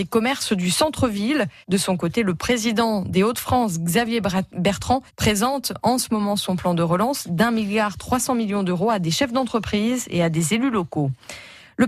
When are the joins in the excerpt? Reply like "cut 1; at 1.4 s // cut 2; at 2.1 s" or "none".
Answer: cut 1; at 1.6 s // cut 2; at 5.1 s